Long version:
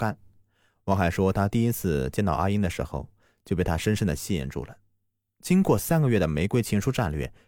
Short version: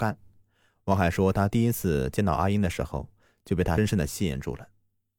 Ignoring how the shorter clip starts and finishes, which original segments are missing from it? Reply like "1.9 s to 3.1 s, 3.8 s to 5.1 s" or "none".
3.8 s to 3.9 s